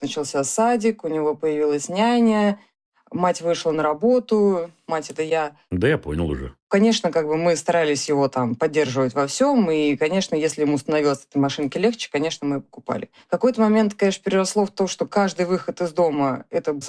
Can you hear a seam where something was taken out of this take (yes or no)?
no